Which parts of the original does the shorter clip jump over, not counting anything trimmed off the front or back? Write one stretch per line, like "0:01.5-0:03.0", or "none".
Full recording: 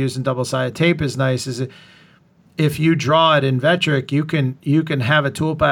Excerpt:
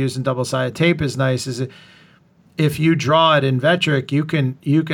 none